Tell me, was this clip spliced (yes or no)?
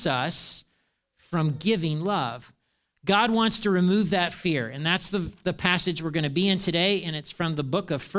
no